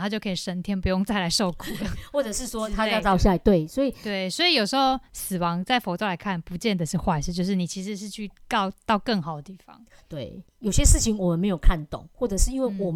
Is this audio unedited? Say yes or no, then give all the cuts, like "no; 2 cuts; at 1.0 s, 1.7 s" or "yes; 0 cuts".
yes; 0 cuts